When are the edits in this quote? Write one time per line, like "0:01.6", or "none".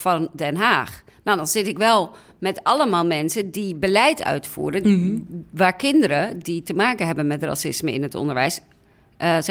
none

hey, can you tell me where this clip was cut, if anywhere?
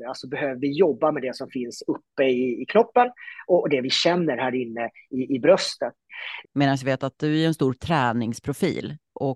0:06.4

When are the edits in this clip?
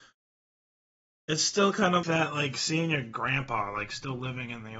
0:02.0

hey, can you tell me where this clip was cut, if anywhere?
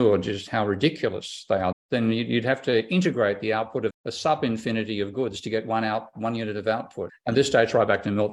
0:01.7
0:03.9
0:07.1

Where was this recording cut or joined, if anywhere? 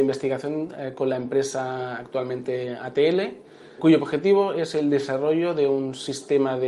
0:03.8

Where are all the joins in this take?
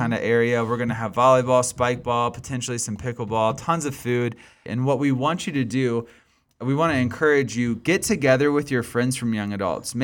0:04.7

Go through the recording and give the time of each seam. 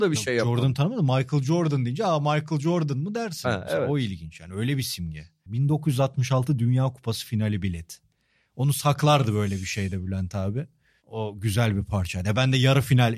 0:05.5

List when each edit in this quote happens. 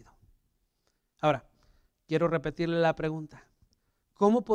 none

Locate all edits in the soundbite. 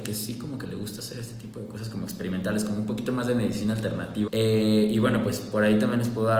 0:04.3

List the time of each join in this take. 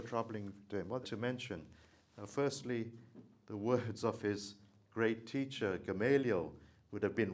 0:01.0

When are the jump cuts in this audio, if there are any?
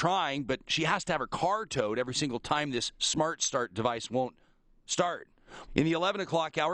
0:05.7

